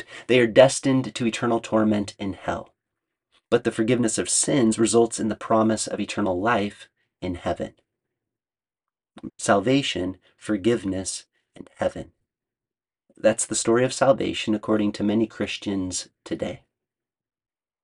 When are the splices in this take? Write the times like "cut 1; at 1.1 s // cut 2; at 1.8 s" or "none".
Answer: cut 1; at 9.3 s